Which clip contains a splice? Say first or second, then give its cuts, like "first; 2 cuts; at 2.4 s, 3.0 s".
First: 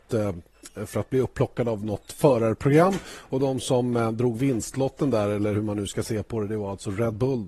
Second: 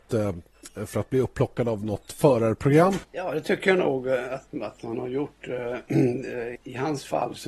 second; 2 cuts; at 3.0 s, 6.6 s